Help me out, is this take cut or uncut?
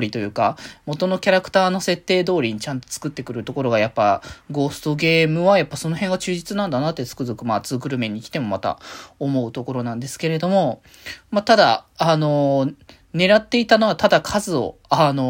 uncut